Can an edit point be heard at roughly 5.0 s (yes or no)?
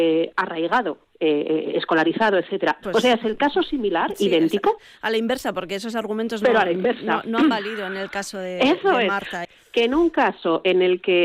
no